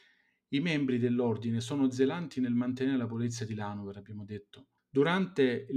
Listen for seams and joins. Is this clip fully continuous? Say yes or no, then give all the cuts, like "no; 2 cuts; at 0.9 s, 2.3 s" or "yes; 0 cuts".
no; 1 cut; at 4.8 s